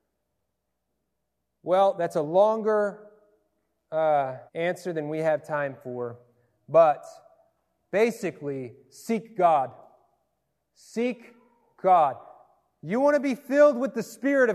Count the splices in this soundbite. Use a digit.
1